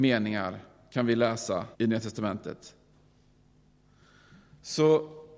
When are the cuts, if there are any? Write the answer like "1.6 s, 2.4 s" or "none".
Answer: 1.7 s